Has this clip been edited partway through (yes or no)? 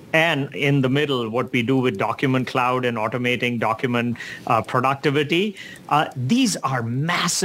no